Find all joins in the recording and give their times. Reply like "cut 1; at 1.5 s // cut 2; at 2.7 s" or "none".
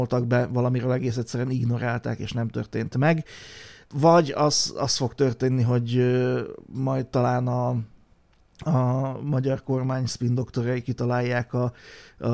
none